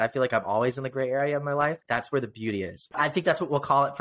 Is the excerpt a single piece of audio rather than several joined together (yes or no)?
no